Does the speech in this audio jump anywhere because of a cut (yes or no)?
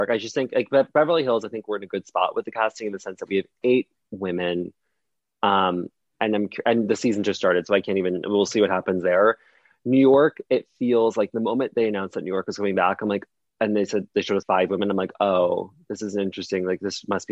yes